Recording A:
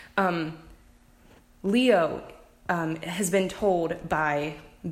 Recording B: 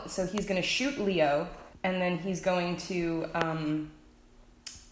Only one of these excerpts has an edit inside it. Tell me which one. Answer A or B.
B